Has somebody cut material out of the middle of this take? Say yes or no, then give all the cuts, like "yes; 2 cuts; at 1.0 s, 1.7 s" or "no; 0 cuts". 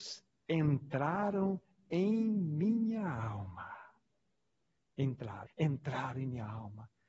yes; 1 cut; at 5.5 s